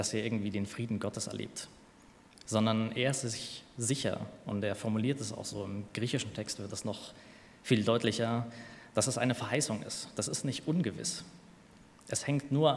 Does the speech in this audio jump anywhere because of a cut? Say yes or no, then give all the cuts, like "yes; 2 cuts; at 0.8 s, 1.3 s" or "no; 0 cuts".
no; 0 cuts